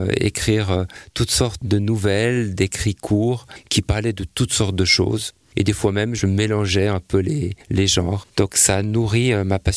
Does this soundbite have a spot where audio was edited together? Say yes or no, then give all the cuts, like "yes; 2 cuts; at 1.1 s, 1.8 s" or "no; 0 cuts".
yes; 1 cut; at 8.2 s